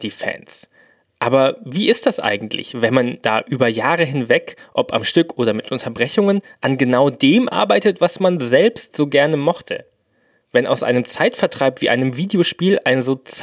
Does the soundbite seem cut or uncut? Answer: uncut